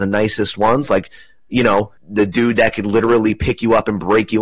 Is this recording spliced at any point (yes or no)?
yes